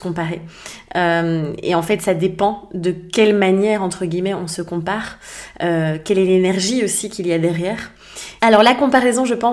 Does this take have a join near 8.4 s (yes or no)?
yes